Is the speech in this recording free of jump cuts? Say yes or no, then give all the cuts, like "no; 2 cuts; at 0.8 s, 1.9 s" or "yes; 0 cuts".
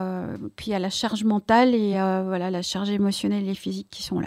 yes; 0 cuts